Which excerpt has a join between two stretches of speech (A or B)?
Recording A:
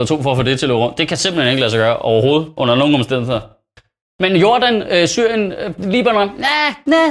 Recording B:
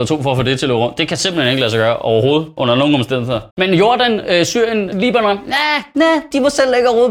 B